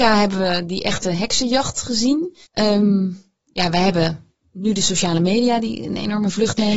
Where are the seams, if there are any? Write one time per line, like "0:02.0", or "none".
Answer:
0:02.5